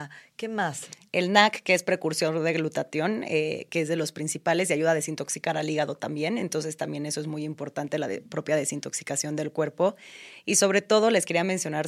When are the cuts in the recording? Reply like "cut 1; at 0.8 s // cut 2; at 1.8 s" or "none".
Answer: none